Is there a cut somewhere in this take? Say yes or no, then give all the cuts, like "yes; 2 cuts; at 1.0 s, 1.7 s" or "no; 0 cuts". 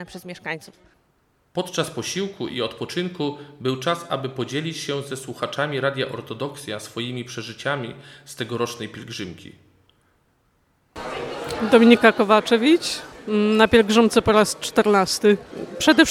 no; 0 cuts